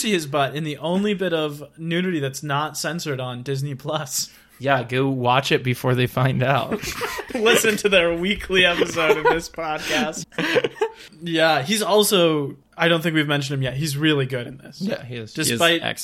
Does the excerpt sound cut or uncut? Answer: cut